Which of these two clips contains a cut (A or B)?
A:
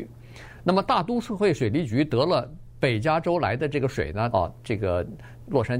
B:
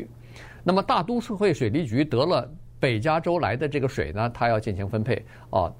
A